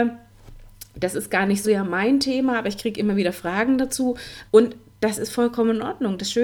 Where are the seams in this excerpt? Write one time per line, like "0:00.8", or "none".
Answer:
0:01.6
0:04.5